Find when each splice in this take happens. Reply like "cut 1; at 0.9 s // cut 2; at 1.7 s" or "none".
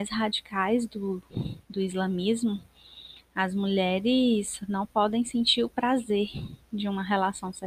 cut 1; at 1.6 s